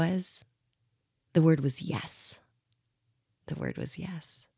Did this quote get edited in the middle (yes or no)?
no